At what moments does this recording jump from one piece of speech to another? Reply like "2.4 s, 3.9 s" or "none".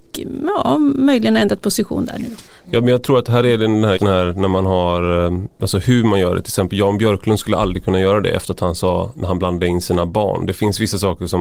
4.0 s